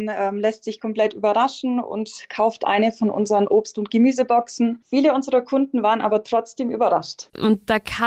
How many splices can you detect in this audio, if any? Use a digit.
1